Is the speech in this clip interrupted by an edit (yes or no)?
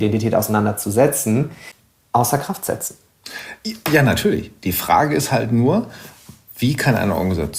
no